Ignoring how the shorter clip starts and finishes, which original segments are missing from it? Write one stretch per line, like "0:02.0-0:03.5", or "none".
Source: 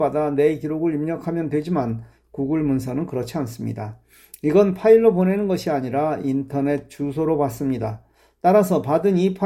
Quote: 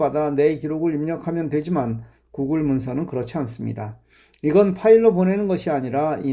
none

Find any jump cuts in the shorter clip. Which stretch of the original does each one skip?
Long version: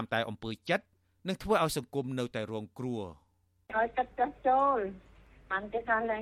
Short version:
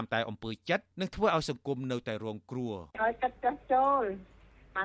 0:00.9-0:01.2
0:03.2-0:03.7

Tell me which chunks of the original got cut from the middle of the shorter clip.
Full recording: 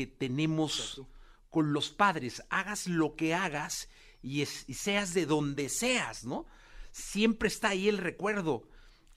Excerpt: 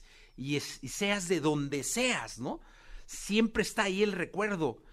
none

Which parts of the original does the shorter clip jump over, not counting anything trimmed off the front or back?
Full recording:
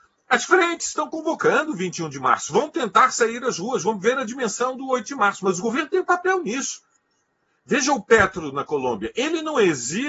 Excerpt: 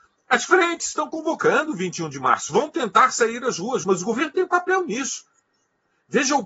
0:03.8-0:05.4

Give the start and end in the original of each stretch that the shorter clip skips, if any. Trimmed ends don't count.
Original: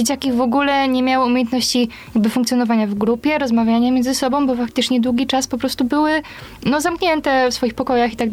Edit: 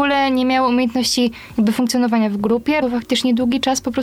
0:03.4-0:04.5

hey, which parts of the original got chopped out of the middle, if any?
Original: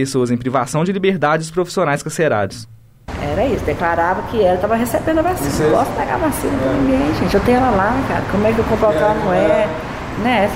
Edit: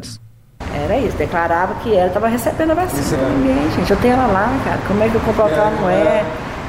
0:05.6-0:06.6

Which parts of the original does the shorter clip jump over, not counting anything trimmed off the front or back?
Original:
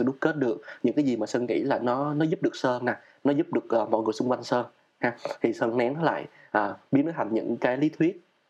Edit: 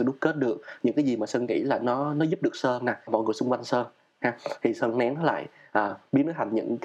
0:03.1-0:03.9

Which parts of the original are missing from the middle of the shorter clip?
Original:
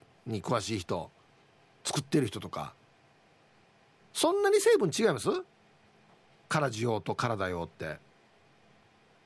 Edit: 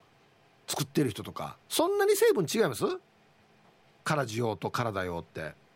0:02.8-0:04.1

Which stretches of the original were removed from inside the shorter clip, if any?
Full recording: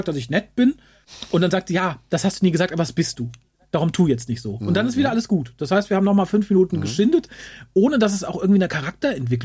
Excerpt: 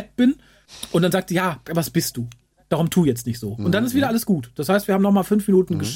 0:02.1-0:02.7

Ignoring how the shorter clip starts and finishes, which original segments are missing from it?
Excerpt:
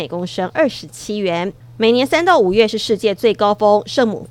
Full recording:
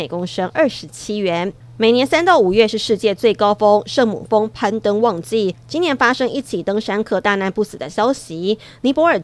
none

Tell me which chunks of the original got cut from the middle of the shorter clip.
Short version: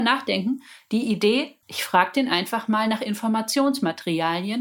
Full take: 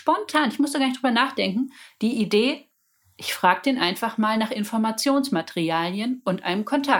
0:02.7-0:03.1

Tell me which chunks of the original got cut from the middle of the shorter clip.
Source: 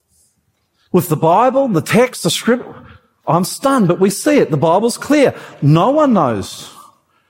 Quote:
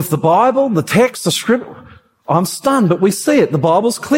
none

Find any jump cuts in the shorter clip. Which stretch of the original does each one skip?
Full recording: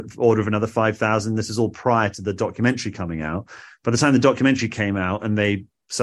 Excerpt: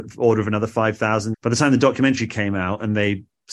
0:01.3-0:03.7

